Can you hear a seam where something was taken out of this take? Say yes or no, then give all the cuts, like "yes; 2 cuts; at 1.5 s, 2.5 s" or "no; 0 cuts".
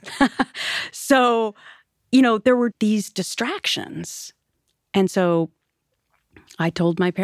yes; 1 cut; at 2.7 s